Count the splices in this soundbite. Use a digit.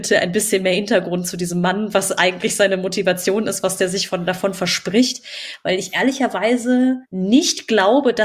1